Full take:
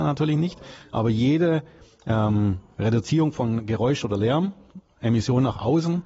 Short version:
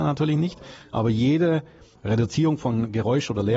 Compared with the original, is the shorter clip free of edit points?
no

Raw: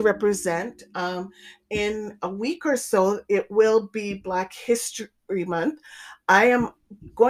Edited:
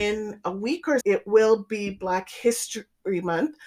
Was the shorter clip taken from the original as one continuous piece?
no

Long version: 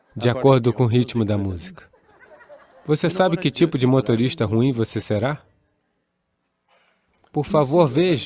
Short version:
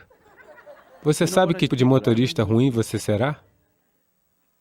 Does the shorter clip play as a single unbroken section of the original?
no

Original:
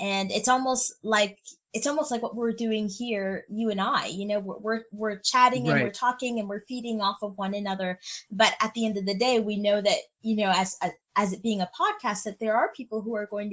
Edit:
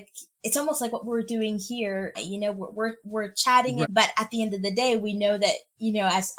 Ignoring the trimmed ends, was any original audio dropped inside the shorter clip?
yes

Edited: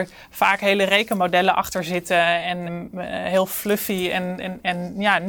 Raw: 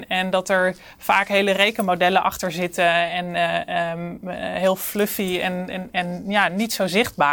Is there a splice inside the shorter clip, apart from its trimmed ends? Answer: yes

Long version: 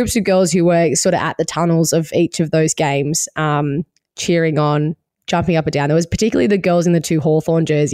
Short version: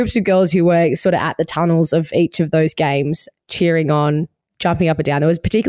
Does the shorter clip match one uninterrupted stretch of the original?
no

